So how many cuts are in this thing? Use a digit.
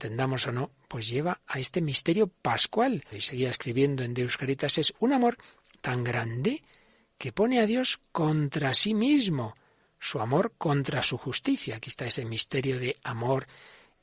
1